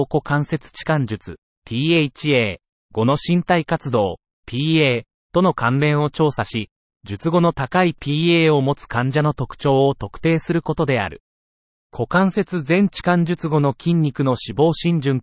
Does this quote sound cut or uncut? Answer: cut